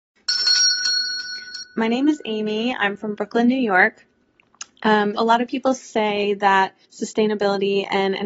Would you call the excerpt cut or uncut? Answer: cut